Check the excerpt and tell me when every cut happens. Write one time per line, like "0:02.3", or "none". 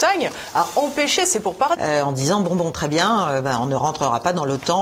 0:01.7